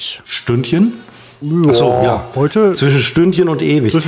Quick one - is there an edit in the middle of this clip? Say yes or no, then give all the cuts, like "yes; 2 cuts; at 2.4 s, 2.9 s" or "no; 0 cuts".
no; 0 cuts